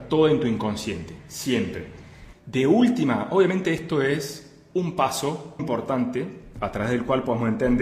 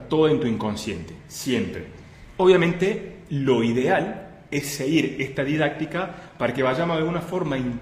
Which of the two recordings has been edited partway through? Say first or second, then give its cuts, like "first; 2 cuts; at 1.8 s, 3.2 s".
first; 2 cuts; at 2.3 s, 5.6 s